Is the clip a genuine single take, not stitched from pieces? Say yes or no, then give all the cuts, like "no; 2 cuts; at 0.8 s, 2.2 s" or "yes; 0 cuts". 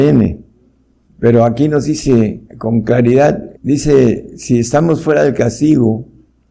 no; 3 cuts; at 1.1 s, 2.5 s, 3.6 s